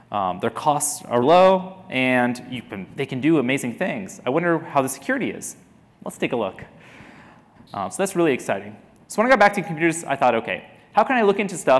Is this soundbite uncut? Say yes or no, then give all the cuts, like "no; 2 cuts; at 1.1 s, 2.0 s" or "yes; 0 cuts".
no; 2 cuts; at 1.2 s, 7.6 s